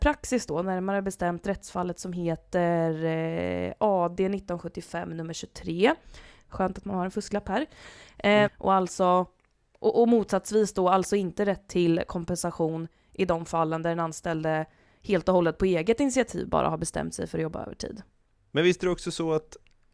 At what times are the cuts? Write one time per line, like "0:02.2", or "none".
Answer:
0:08.5